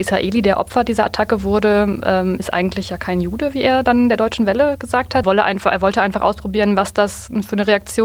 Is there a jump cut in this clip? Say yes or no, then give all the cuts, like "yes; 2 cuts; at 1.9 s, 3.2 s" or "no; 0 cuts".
yes; 1 cut; at 5.2 s